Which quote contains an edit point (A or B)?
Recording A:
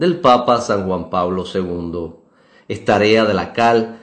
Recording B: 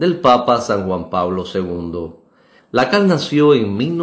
B